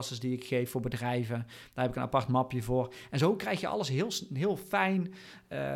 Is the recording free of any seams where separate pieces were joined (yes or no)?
yes